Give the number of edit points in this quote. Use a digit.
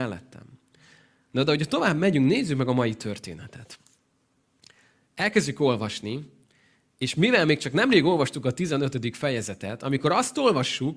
0